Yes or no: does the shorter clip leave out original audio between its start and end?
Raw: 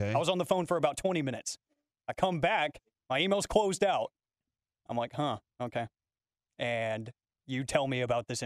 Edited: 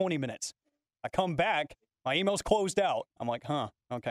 yes